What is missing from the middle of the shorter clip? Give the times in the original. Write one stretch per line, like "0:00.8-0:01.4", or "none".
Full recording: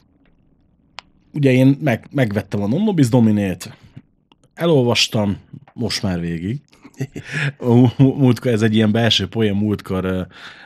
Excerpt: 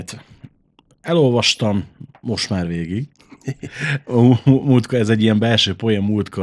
none